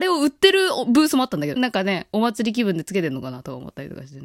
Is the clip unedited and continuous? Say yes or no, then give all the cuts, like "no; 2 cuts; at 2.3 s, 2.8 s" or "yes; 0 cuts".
no; 1 cut; at 1.6 s